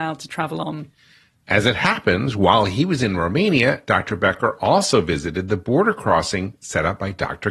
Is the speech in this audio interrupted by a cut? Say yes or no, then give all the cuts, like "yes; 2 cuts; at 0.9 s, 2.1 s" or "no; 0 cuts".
no; 0 cuts